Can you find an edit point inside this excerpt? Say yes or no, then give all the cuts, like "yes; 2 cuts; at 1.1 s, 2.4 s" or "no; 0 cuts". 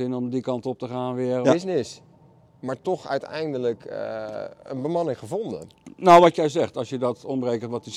yes; 1 cut; at 1.4 s